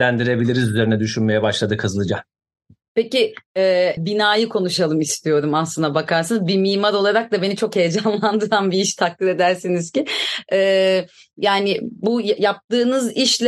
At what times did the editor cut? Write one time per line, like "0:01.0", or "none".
0:04.0